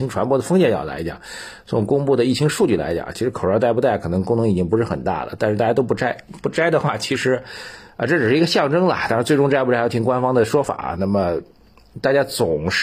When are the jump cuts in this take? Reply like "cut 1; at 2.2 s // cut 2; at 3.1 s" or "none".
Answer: none